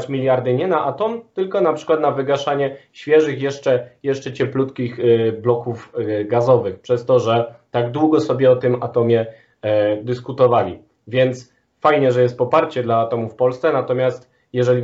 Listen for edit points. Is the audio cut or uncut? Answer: uncut